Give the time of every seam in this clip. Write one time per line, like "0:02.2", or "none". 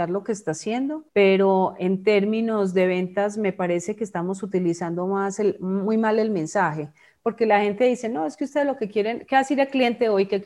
0:01.1